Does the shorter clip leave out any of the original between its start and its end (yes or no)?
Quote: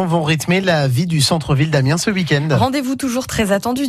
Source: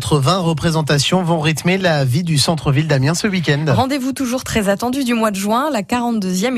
no